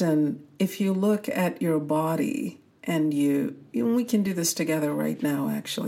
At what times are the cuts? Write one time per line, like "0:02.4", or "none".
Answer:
none

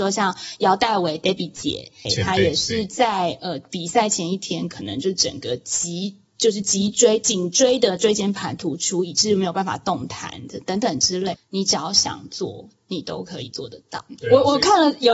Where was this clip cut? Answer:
0:02.0
0:11.3

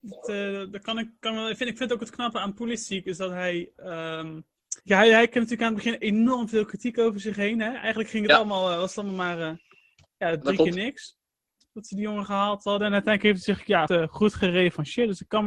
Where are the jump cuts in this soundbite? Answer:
0:04.8
0:13.9

